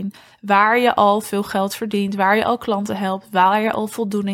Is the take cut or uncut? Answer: uncut